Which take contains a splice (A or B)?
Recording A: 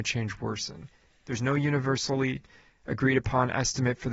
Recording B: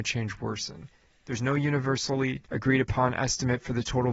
B